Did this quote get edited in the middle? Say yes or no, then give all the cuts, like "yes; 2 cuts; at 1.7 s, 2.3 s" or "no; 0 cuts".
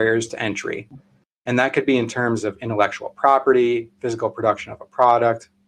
no; 0 cuts